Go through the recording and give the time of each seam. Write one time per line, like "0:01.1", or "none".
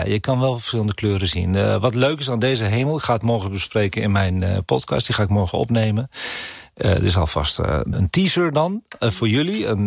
0:07.9